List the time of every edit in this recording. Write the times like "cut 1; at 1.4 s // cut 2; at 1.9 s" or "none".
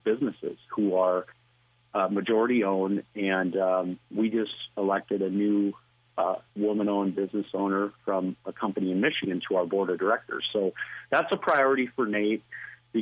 cut 1; at 6.5 s